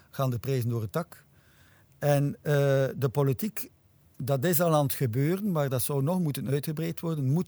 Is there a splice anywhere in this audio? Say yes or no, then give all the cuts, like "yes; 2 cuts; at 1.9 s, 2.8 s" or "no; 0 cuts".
no; 0 cuts